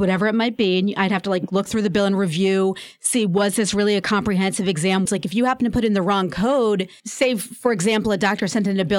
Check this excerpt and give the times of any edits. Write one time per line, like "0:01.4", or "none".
0:05.1